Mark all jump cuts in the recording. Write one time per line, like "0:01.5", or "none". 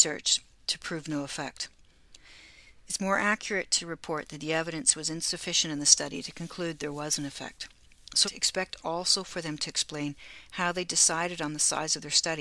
0:08.2